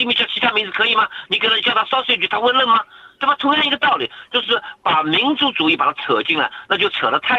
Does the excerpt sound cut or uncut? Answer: uncut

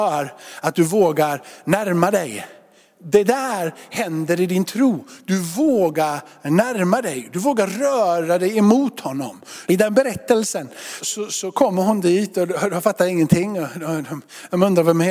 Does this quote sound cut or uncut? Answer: cut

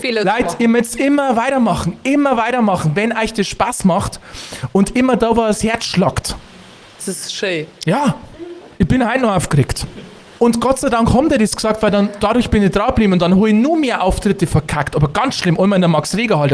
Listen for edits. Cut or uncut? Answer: cut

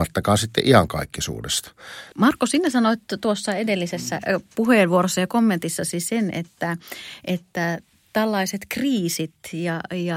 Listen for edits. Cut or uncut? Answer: cut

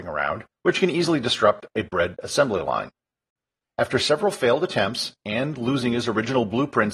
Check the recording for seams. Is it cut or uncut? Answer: cut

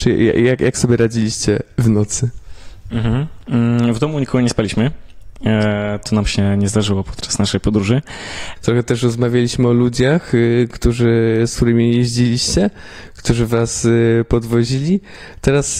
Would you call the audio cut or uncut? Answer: cut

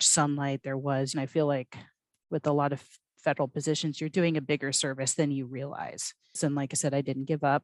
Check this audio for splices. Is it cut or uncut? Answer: cut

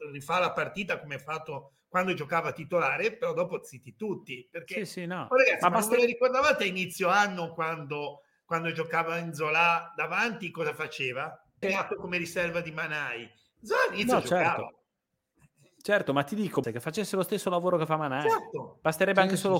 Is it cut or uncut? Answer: cut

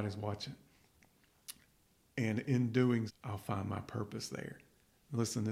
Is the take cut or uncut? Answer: cut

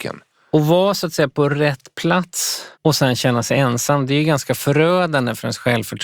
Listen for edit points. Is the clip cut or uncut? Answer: cut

